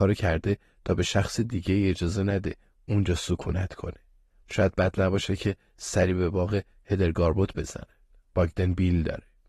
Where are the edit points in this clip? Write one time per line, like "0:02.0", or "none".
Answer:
0:04.4